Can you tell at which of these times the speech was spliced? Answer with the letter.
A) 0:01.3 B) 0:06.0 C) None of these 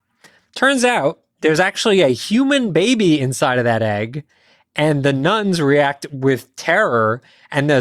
A